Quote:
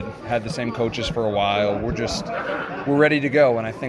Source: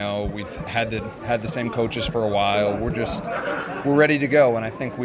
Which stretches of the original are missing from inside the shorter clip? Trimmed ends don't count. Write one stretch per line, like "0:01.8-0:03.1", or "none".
none